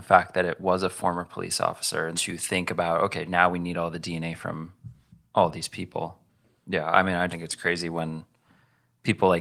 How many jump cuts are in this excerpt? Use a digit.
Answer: 2